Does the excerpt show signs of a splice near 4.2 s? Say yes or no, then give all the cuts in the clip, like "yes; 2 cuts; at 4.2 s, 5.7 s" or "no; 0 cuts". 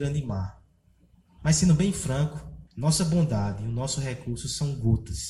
no; 2 cuts; at 1.4 s, 2.7 s